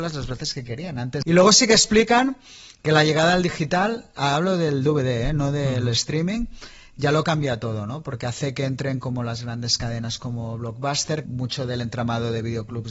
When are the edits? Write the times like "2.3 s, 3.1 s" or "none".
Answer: 1.2 s, 11.2 s